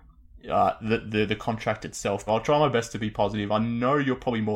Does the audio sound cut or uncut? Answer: cut